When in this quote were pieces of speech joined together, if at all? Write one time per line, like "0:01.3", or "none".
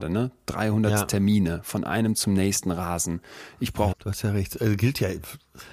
0:03.9